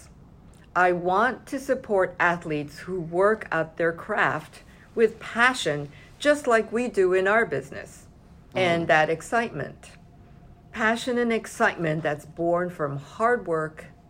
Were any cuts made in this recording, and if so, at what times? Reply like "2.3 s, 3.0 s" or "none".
8.5 s